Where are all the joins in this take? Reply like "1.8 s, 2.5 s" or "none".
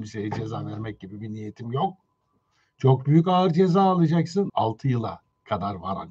4.5 s

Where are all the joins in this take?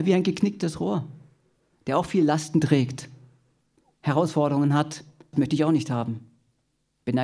5.3 s

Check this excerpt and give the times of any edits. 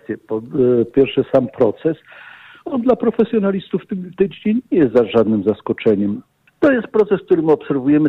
0.9 s, 6.5 s

